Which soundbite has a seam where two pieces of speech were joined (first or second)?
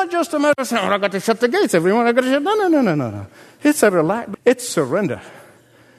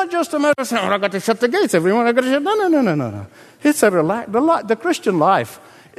first